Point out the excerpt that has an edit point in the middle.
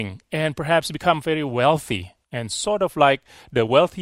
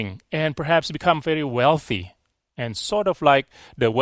first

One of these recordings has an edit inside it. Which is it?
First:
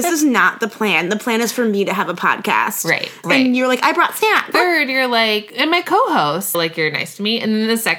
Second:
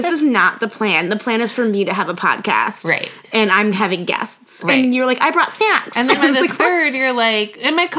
first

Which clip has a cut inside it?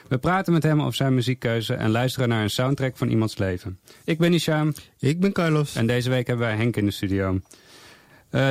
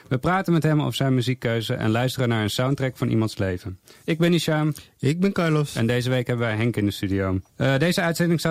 second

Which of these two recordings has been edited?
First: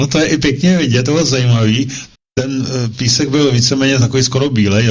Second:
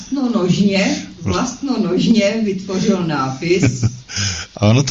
first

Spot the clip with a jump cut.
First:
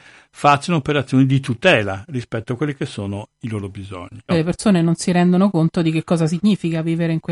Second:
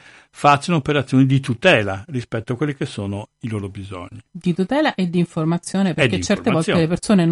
first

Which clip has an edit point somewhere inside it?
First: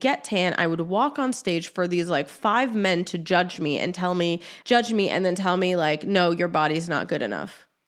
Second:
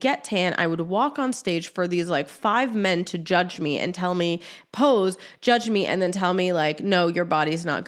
first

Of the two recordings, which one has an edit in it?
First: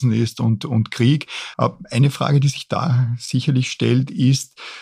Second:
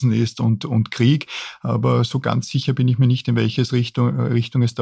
first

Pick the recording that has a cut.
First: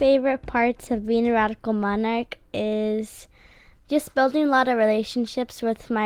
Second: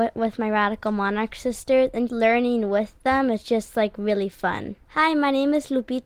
second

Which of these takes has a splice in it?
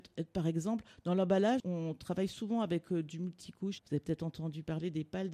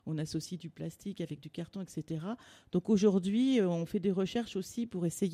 first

